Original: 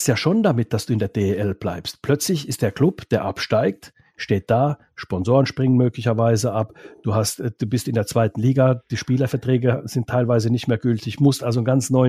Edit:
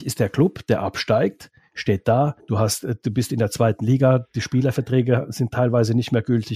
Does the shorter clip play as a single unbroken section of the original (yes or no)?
no